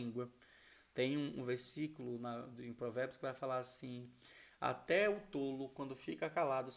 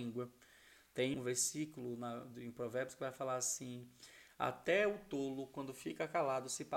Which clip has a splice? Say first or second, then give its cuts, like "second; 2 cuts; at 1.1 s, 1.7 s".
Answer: second; 1 cut; at 1.1 s